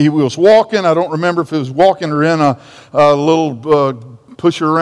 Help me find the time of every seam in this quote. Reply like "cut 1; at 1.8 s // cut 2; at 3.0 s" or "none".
none